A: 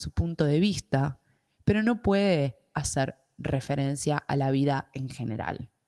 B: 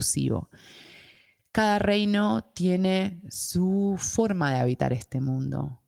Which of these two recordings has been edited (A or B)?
B